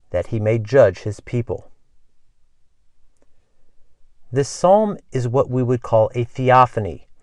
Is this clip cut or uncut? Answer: uncut